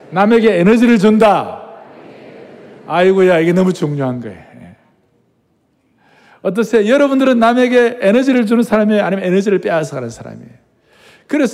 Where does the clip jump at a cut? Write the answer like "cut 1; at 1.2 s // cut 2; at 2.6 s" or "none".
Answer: none